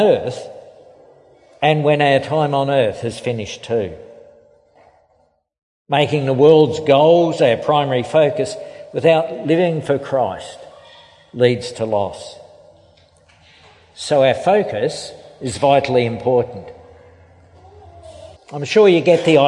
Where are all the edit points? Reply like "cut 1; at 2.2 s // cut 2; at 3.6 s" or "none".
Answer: cut 1; at 18.4 s